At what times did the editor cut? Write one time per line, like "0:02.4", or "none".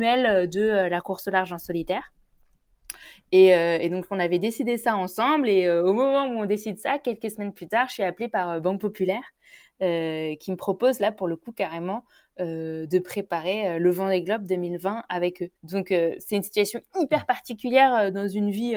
0:15.6